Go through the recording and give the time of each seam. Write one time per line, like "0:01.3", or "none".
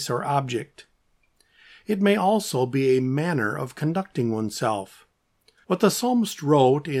0:05.6